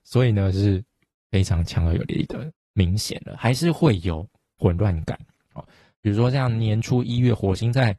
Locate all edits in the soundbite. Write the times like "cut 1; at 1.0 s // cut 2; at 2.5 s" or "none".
cut 1; at 2.6 s // cut 2; at 4.6 s